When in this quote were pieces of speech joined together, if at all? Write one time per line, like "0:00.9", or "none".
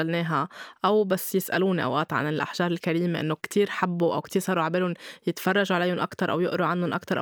0:03.4